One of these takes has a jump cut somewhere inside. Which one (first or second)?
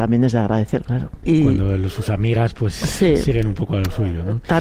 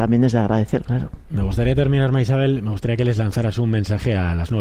first